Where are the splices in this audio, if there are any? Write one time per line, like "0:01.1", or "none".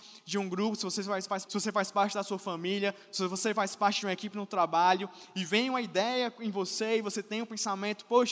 0:01.5

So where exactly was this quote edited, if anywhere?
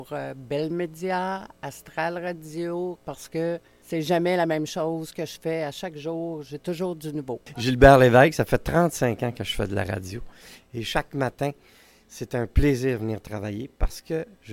0:03.0

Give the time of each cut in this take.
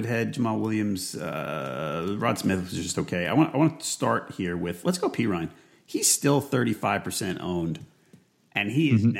none

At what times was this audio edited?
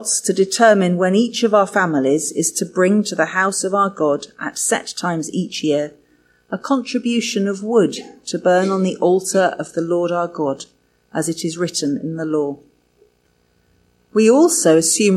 none

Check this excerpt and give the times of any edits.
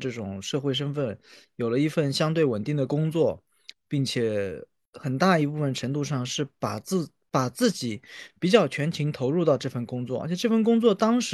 none

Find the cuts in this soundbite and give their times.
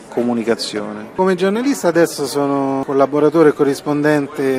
none

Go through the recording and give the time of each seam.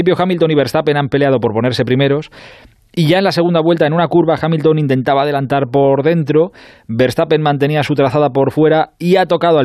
none

